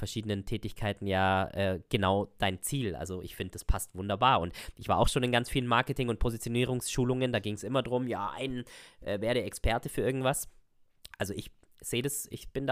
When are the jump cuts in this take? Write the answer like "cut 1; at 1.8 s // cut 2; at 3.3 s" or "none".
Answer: none

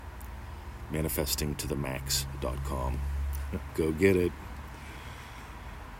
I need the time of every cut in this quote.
cut 1; at 3.7 s

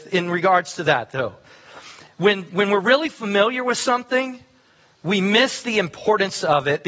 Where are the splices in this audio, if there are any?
none

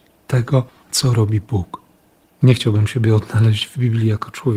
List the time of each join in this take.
cut 1; at 2.3 s

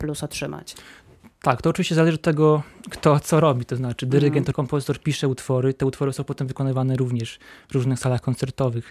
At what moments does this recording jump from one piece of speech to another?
cut 1; at 4.5 s

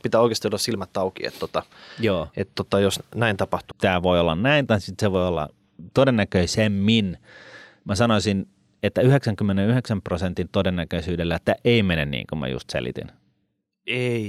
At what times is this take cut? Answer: cut 1; at 3.7 s

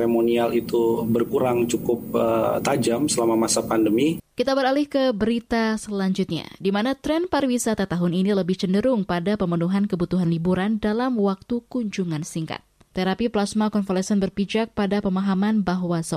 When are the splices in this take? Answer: cut 1; at 4.2 s // cut 2; at 12.9 s

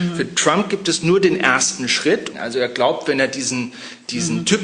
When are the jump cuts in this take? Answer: cut 1; at 2.3 s

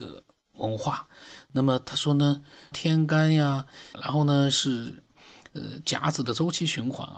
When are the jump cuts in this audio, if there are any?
cut 1; at 2.7 s // cut 2; at 3.9 s

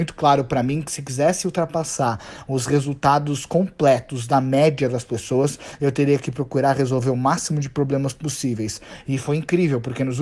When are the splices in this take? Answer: none

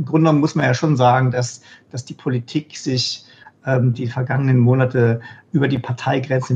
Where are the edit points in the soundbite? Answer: none

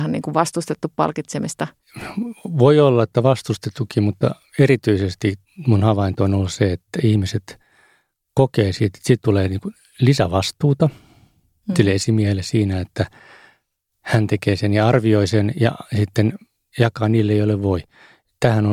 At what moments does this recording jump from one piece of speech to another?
none

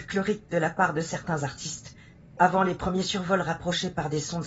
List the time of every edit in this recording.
cut 1; at 2.4 s

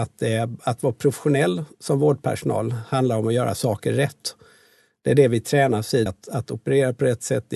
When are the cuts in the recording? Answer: cut 1; at 6.1 s

